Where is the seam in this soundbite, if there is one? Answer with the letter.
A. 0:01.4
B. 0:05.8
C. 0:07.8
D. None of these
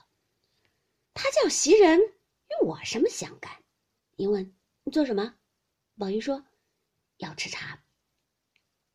D